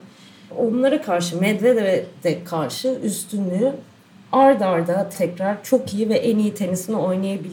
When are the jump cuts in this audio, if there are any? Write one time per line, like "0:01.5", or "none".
0:05.1